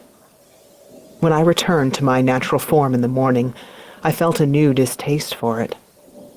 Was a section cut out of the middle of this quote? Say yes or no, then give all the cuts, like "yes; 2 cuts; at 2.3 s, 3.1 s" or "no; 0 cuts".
no; 0 cuts